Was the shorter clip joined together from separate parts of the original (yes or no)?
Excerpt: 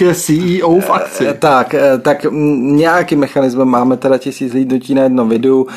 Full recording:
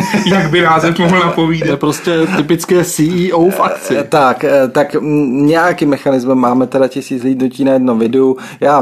no